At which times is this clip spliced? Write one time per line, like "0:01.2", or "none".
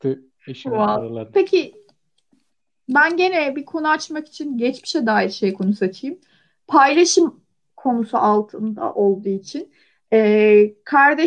0:01.3